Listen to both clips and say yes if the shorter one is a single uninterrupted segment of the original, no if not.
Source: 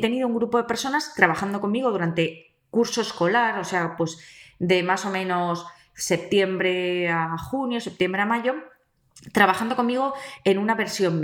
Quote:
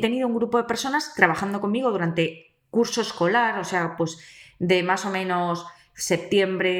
yes